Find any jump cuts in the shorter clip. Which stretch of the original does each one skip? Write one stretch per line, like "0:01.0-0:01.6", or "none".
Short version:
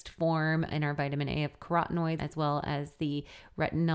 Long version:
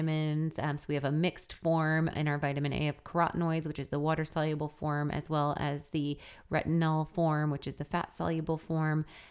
0:03.6-0:05.1